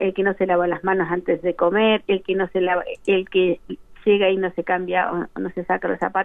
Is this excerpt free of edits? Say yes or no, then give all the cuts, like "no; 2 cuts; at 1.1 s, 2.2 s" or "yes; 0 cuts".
yes; 0 cuts